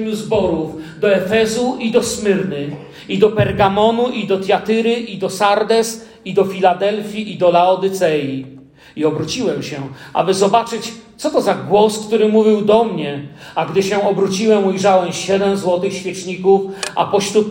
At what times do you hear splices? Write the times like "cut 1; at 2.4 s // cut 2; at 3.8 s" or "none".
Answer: none